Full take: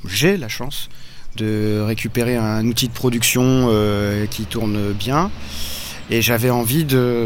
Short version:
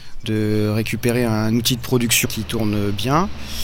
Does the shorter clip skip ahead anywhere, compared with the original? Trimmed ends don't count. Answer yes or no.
yes